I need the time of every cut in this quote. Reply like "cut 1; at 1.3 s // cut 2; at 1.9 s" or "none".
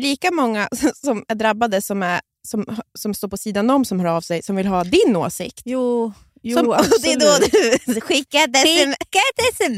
none

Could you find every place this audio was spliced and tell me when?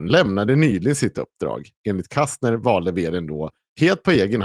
none

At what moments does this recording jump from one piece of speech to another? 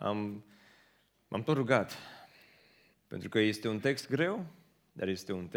cut 1; at 2.9 s

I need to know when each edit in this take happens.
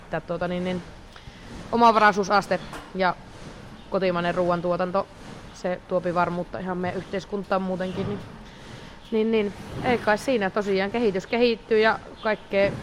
none

